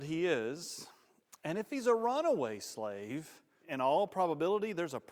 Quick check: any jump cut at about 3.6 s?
yes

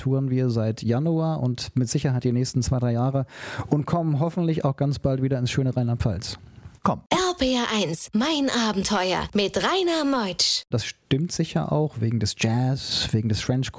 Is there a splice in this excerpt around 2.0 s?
no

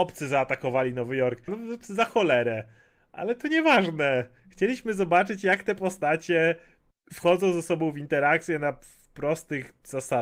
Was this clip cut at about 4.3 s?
no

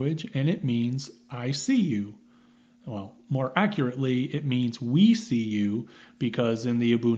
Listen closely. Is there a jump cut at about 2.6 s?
no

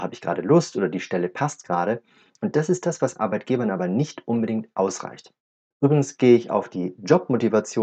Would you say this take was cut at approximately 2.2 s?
no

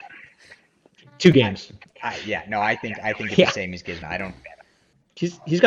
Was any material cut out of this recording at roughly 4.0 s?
yes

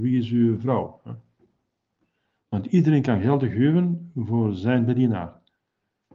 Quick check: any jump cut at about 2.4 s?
yes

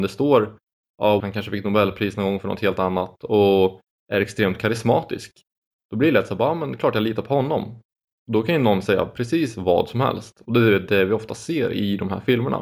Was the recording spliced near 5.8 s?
no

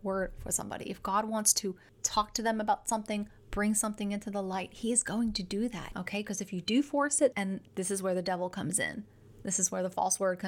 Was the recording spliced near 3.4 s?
no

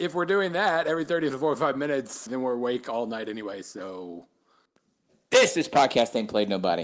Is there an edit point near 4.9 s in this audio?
no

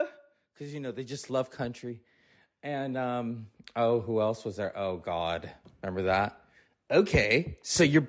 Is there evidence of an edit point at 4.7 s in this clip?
no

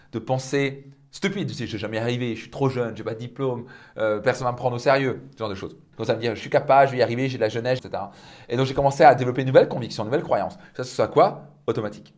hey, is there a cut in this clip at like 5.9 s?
yes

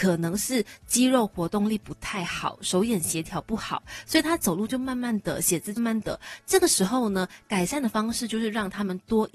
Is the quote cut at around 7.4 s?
no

